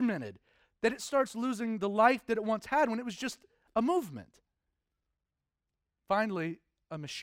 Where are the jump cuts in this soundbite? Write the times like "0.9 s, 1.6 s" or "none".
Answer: none